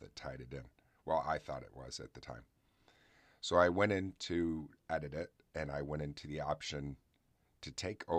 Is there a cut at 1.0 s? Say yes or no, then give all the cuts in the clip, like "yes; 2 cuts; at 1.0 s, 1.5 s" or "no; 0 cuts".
no; 0 cuts